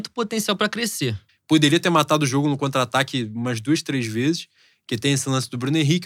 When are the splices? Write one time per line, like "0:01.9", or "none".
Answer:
0:01.3